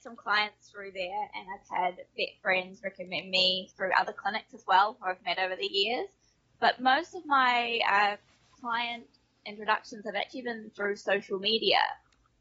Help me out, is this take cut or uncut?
uncut